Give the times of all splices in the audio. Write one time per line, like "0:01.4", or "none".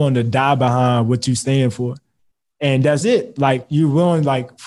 0:03.0